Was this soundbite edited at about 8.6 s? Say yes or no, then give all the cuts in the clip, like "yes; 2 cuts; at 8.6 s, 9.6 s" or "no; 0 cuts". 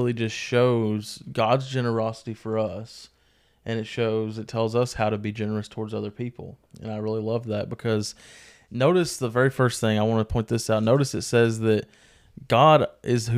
no; 0 cuts